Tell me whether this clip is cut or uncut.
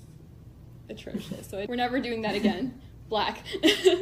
cut